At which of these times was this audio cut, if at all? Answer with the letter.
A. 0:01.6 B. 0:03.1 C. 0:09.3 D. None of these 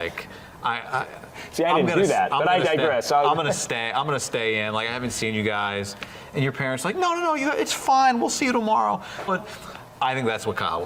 C